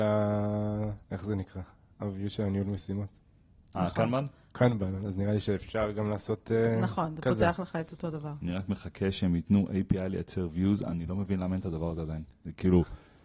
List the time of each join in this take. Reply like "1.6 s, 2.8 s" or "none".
1.0 s